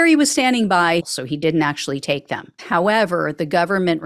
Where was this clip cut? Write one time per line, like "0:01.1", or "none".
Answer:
0:01.0
0:02.6